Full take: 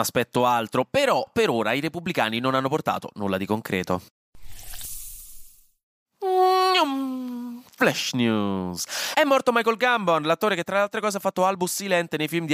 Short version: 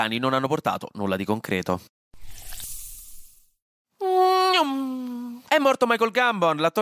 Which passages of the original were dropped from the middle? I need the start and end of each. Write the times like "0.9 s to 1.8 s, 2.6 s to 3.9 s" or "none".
7.7 s to 9.1 s